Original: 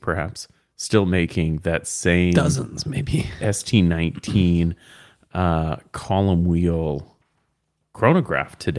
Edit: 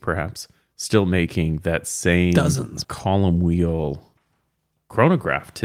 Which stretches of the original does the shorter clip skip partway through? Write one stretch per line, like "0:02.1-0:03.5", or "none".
0:02.8-0:05.9